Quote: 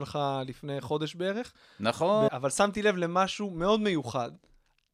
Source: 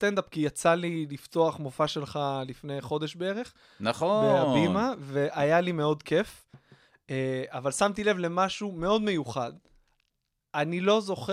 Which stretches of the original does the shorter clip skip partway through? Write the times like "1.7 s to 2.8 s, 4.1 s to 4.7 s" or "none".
4.3 s to 7.5 s